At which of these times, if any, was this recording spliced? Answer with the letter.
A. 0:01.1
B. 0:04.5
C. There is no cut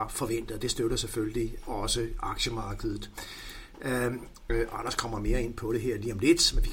B